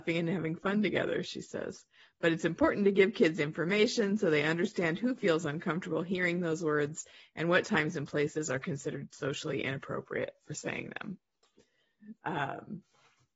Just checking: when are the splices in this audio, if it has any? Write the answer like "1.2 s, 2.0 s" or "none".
none